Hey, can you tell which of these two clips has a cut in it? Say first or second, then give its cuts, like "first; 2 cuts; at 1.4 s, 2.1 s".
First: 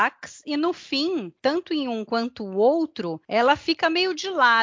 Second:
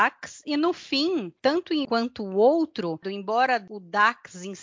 second; 2 cuts; at 1.8 s, 3.0 s